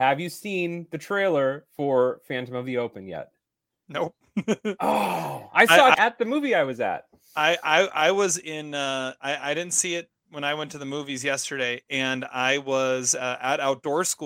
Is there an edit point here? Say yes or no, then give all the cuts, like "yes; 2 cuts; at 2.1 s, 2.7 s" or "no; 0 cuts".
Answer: yes; 1 cut; at 5.9 s